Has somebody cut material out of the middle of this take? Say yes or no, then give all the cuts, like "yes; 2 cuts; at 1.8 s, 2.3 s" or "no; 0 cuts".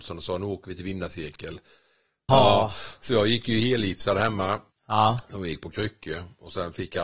yes; 2 cuts; at 2.3 s, 4.7 s